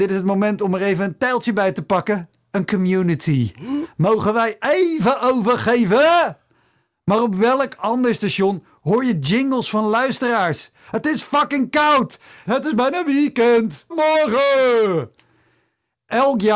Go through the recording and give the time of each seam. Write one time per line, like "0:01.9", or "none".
0:12.5
0:13.9